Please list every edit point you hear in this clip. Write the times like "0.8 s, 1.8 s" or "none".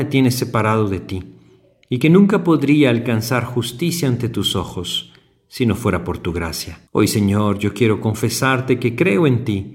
6.9 s